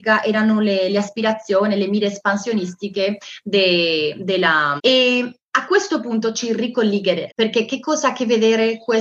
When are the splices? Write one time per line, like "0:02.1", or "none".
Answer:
0:04.8
0:07.3